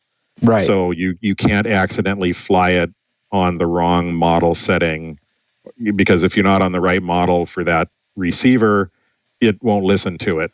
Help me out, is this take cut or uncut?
uncut